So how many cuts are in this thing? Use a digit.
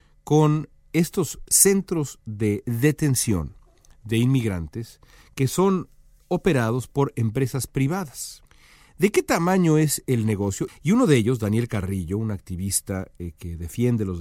1